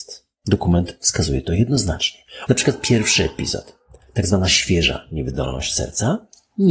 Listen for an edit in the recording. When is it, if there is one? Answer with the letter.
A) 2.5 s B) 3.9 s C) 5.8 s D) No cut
A